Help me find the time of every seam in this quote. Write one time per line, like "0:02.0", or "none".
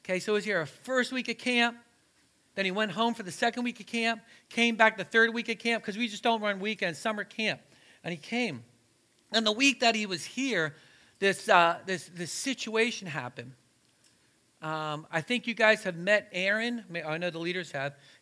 none